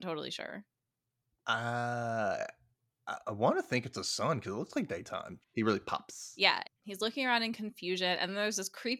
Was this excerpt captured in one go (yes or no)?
no